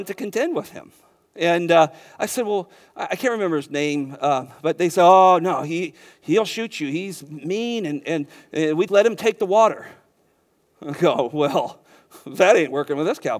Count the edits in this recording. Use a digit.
1